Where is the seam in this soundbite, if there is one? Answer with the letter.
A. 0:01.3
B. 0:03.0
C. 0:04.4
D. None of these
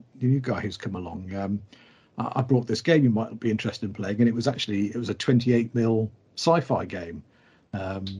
D